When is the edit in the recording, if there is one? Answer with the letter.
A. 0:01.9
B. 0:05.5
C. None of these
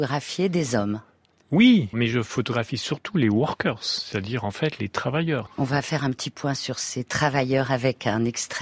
A